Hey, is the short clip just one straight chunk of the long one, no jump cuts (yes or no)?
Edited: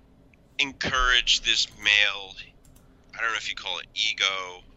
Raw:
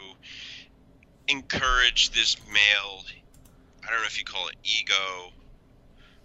yes